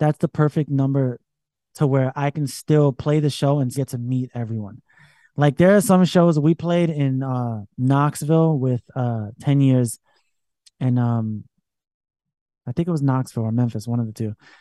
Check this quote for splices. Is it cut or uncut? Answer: cut